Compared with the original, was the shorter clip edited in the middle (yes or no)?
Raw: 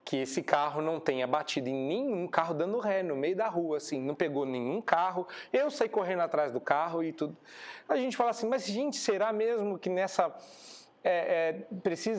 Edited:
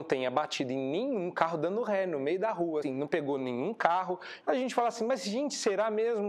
yes